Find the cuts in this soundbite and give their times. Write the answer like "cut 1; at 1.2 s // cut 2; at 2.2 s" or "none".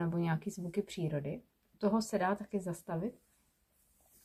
none